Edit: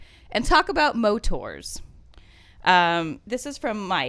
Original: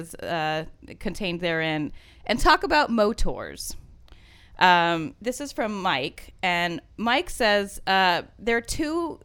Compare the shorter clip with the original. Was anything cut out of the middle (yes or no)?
no